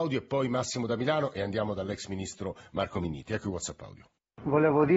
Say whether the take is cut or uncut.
uncut